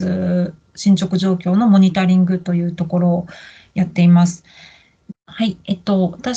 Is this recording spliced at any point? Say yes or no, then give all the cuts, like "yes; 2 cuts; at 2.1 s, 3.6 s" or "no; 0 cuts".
yes; 1 cut; at 5.1 s